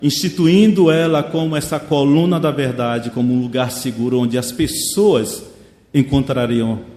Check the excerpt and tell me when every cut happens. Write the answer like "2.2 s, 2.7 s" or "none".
3.1 s